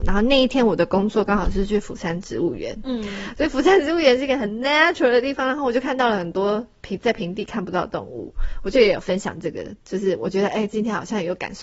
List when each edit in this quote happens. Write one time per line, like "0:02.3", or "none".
none